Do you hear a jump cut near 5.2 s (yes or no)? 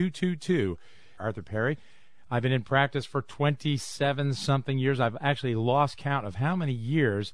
no